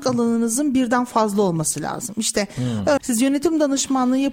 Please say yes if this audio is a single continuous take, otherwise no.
no